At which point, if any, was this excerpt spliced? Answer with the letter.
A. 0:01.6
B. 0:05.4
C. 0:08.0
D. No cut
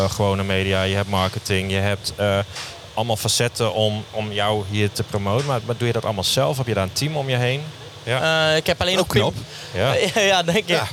C